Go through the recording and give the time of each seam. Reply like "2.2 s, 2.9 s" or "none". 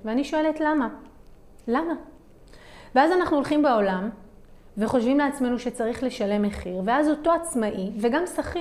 none

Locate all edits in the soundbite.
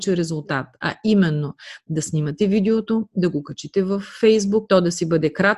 4.7 s

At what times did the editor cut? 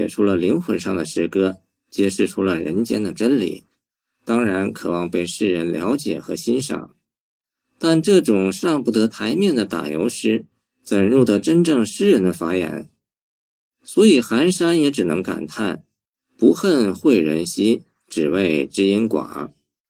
none

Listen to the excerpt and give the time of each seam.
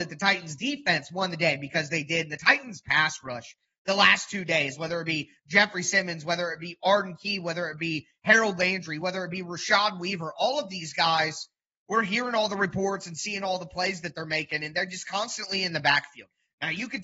none

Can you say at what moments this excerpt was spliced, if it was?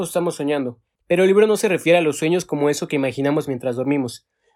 1.0 s

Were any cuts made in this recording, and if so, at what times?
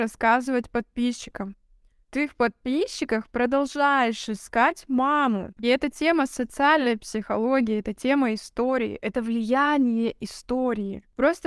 1.9 s, 5.6 s

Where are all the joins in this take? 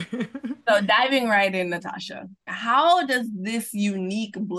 2.5 s

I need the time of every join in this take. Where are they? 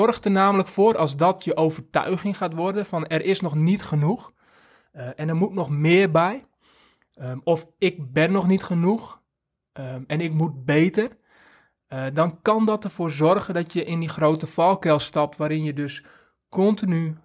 none

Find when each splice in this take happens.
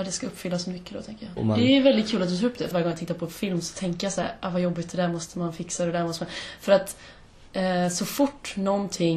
1.4 s, 2.7 s

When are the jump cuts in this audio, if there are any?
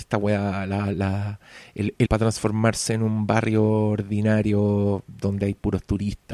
2.1 s

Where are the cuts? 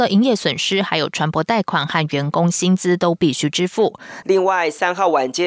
4.2 s

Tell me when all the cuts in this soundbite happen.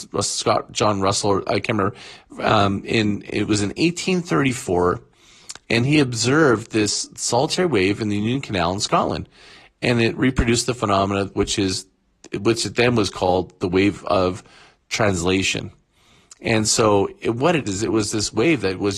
17.7 s

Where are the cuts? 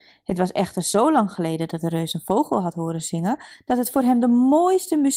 none

